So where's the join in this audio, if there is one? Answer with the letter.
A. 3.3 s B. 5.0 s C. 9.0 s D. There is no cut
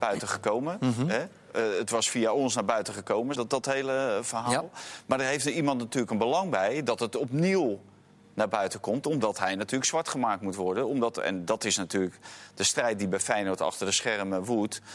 A